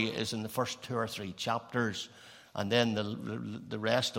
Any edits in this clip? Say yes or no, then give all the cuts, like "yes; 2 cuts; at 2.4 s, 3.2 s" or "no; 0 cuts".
no; 0 cuts